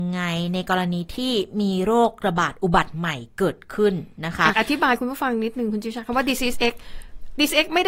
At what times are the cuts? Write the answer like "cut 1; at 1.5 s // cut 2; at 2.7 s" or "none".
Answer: cut 1; at 4.5 s